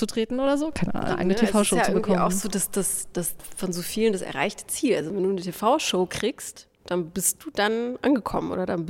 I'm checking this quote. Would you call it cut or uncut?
cut